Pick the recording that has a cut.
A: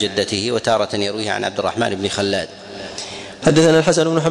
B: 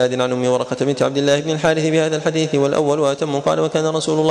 A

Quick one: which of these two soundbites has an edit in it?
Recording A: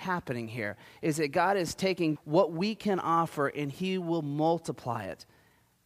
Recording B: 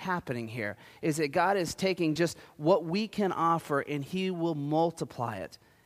A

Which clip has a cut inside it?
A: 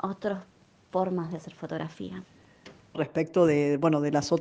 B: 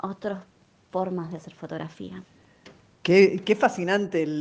A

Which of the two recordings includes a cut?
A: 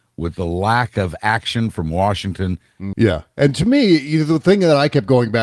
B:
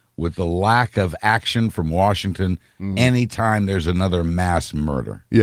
A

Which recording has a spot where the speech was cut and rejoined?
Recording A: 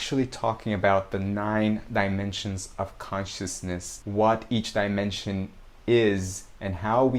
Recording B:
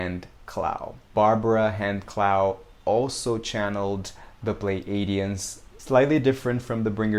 B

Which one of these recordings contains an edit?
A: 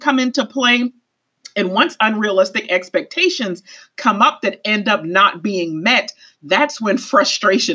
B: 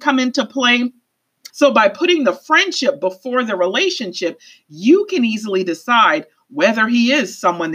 B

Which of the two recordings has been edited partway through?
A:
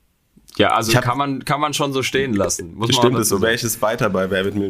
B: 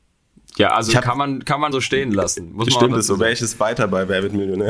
B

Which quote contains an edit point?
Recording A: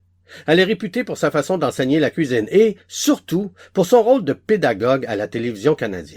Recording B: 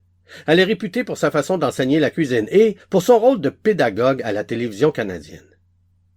B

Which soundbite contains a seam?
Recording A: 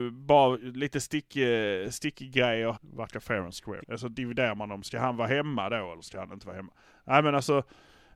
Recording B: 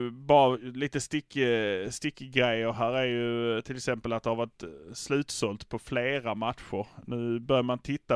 A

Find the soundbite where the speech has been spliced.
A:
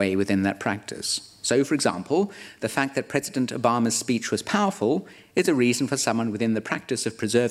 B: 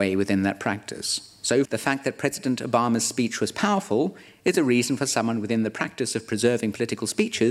B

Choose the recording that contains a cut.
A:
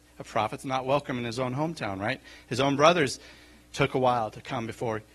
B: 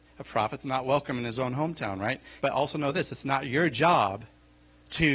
B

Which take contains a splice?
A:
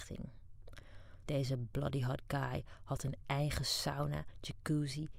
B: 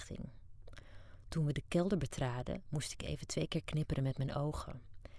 A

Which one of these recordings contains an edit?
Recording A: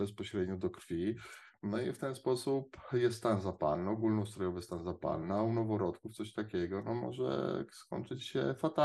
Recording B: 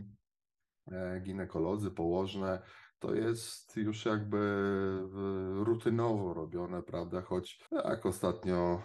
B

